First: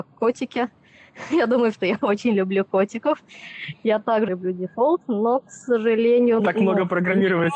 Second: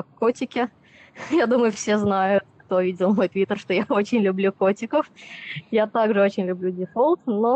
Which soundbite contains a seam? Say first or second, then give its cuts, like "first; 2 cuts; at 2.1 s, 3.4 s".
first; 3 cuts; at 1.7 s, 4.3 s, 6.4 s